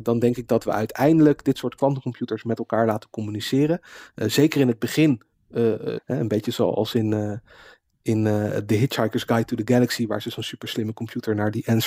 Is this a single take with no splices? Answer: no; 1 cut; at 6.0 s

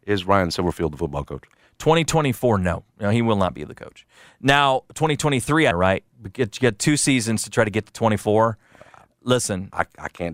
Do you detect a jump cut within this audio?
yes; 1 cut; at 5.7 s

